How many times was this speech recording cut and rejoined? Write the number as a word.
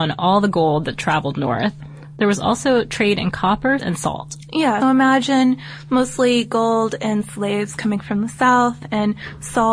three